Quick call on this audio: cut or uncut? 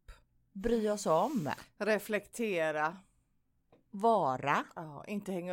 uncut